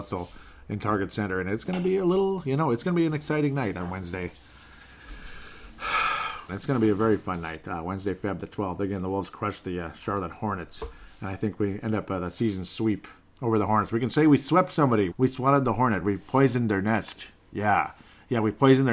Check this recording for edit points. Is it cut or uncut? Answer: cut